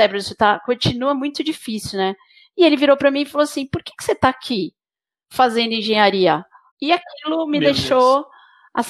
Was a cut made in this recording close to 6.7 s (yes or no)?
yes